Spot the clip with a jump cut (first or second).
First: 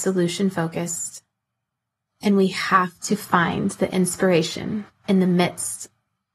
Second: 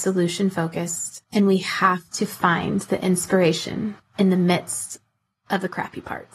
second